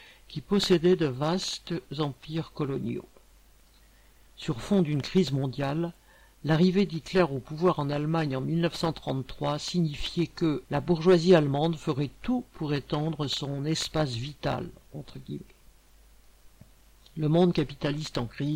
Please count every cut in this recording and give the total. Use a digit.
1